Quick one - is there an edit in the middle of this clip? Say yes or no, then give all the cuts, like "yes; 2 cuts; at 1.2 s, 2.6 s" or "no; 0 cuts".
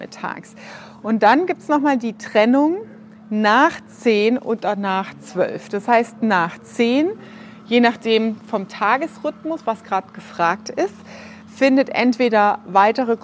no; 0 cuts